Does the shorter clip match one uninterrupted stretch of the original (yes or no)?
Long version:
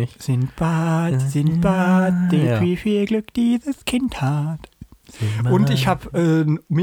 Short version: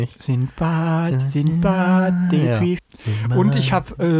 no